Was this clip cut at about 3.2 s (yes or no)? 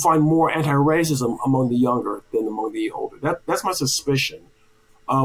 no